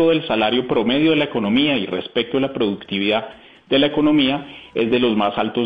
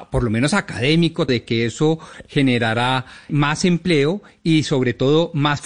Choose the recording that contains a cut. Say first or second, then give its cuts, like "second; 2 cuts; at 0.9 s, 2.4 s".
second; 2 cuts; at 1.3 s, 3.3 s